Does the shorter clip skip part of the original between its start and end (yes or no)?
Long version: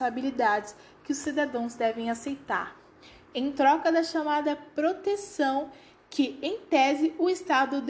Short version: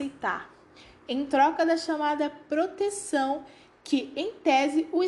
no